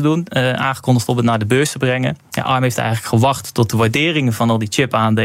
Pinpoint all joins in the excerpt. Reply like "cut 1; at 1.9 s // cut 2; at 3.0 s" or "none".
none